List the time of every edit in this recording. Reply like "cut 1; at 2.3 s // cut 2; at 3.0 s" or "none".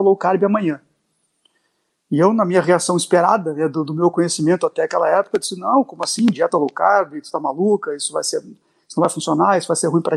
none